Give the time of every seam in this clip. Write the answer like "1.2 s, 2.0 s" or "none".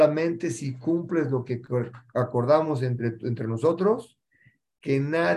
none